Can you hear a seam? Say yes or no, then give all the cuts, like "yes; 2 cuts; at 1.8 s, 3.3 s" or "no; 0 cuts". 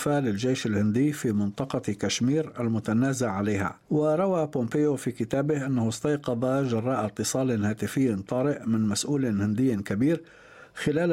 yes; 1 cut; at 3.8 s